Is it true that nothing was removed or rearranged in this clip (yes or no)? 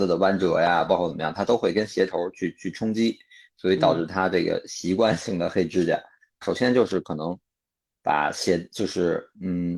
no